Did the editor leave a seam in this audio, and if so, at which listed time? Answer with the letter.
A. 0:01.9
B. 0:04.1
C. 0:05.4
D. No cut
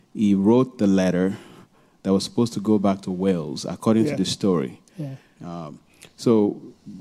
C